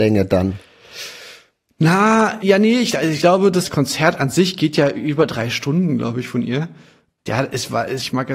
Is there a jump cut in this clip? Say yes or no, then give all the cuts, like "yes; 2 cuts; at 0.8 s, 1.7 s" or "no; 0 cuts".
no; 0 cuts